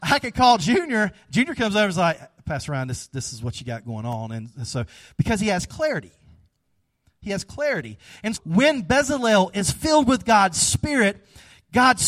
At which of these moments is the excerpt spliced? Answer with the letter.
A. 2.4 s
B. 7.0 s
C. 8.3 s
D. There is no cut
C